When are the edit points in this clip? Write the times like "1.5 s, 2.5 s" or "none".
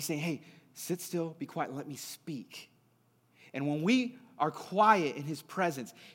none